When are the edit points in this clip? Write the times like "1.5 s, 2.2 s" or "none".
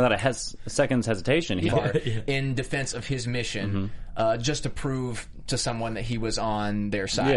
1.7 s